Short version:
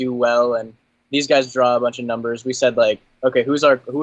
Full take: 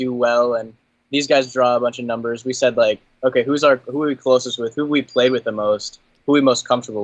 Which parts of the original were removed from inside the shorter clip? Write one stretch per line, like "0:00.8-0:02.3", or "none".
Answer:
none